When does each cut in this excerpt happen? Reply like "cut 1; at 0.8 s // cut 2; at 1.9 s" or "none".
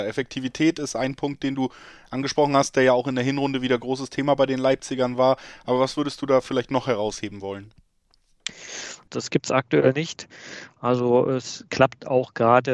cut 1; at 9.1 s